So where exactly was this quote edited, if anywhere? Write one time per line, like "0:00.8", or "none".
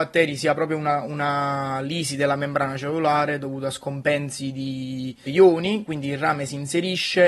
0:05.3